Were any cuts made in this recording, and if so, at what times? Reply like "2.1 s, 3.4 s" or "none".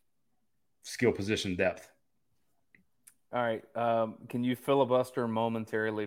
none